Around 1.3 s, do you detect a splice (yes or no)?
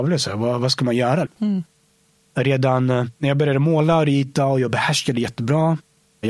yes